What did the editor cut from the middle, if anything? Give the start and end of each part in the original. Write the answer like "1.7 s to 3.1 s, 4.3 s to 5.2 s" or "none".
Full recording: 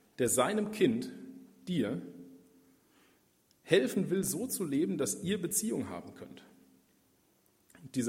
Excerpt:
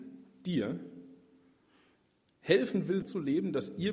4.2 s to 4.5 s